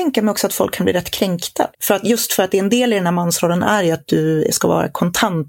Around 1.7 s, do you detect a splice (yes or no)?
yes